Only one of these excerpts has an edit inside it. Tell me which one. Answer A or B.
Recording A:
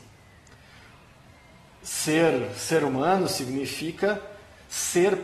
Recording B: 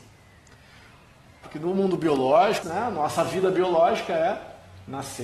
B